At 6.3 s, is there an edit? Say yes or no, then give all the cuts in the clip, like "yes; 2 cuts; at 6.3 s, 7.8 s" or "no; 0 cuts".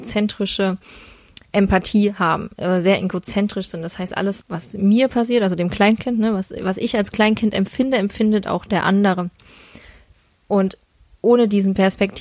no; 1 cut; at 4.4 s